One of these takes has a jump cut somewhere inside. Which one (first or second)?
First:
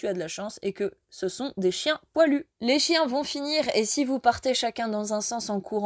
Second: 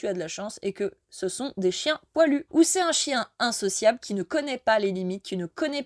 second